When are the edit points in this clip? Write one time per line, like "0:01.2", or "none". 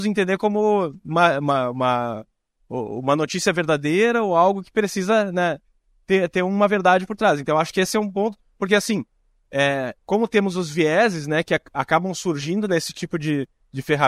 none